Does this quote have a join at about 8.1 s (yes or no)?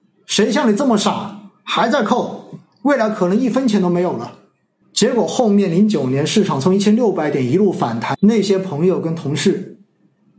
yes